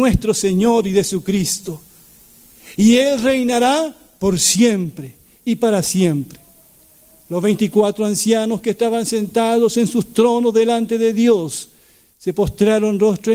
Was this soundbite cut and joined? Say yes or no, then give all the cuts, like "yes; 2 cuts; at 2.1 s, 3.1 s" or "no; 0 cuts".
no; 0 cuts